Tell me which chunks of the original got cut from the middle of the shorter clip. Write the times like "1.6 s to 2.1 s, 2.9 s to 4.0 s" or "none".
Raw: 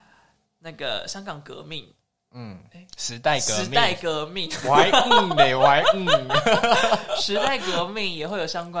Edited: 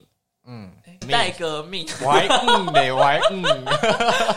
2.9 s to 3.6 s